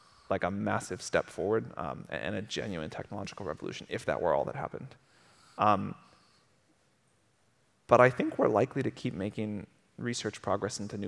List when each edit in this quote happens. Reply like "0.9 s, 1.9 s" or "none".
none